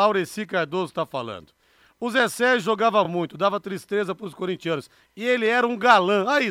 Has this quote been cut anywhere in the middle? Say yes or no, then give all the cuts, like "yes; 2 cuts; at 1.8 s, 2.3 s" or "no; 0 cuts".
no; 0 cuts